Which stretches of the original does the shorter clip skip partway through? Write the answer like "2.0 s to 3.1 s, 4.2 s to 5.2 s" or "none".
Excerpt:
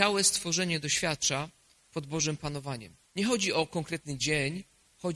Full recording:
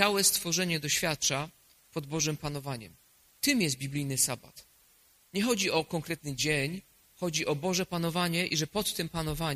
3.0 s to 5.2 s